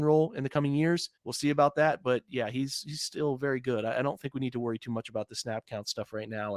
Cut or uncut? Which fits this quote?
cut